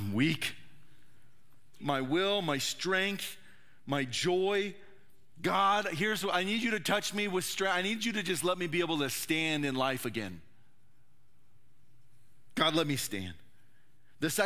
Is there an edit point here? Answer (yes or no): yes